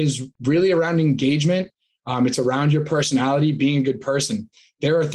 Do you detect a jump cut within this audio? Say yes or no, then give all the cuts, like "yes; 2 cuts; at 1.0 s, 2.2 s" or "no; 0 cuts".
no; 0 cuts